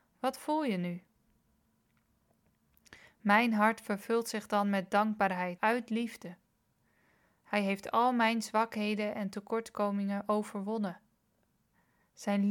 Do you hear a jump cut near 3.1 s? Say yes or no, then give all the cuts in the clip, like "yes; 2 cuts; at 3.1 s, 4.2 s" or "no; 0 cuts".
no; 1 cut; at 5.6 s